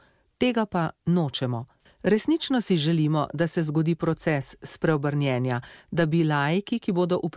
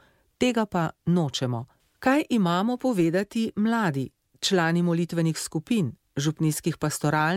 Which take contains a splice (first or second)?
first